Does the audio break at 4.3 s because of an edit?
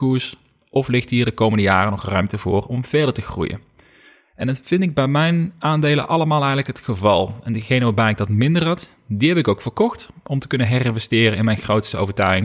no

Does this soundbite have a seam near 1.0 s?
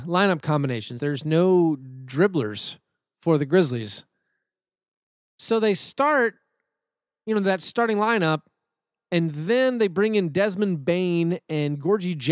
yes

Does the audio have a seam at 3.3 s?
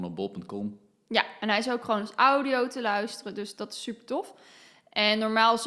no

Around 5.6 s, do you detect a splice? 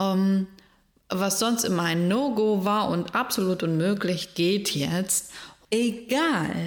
yes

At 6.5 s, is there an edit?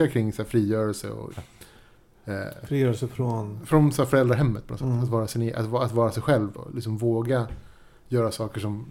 yes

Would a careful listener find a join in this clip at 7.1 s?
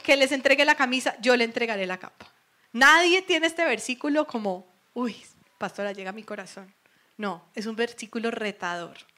no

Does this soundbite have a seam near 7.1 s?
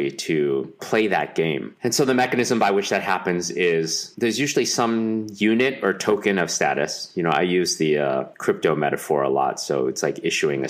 no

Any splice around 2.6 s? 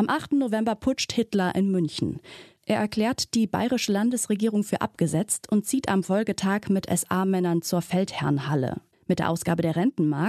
no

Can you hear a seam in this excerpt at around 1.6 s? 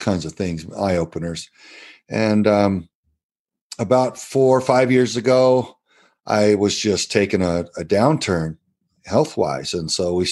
no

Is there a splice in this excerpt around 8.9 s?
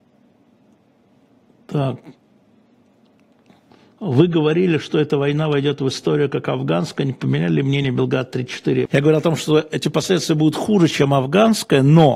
yes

